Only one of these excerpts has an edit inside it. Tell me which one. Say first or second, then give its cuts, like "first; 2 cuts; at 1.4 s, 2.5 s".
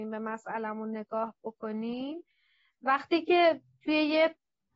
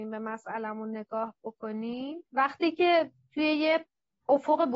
second; 1 cut; at 2.3 s